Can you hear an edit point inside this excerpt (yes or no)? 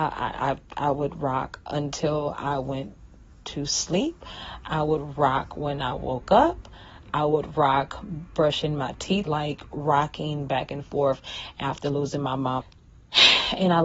yes